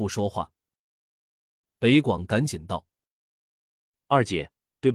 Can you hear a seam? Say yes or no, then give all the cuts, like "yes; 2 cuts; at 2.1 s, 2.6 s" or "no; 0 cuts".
no; 0 cuts